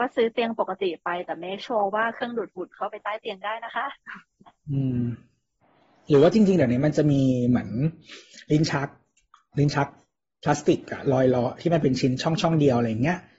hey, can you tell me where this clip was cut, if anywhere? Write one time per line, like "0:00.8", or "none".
none